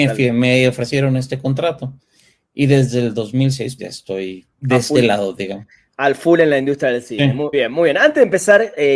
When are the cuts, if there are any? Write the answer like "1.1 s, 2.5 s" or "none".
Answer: 3.8 s, 7.5 s